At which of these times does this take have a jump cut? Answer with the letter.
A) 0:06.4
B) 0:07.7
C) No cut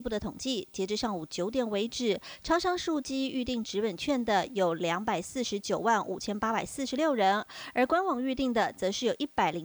C